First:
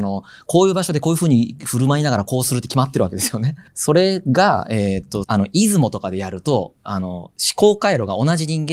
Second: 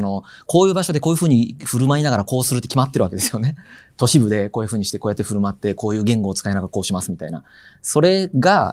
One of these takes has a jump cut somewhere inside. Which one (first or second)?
first